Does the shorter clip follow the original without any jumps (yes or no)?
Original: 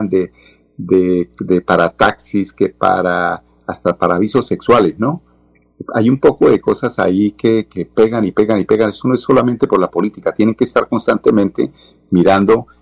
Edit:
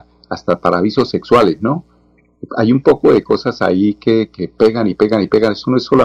yes